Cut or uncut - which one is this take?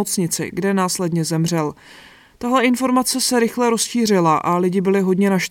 uncut